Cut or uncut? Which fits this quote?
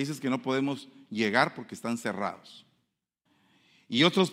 uncut